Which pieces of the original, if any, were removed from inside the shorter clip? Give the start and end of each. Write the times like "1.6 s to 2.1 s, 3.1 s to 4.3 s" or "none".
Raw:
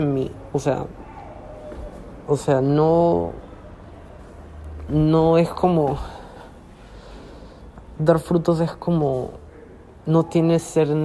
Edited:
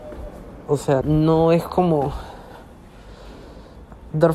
2.6 s to 4.9 s